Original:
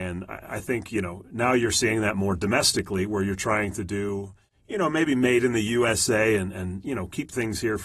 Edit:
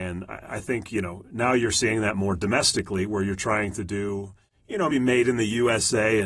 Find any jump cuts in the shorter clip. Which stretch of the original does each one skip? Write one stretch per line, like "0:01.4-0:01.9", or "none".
0:04.9-0:05.1